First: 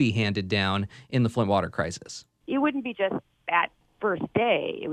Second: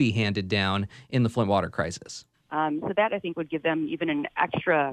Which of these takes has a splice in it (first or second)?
second